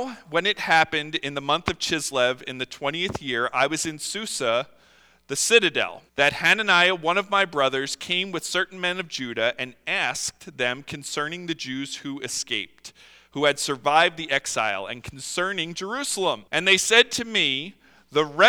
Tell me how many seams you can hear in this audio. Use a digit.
2